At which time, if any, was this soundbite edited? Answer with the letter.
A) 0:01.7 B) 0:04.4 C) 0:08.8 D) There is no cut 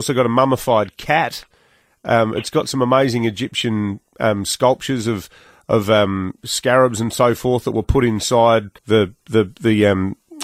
C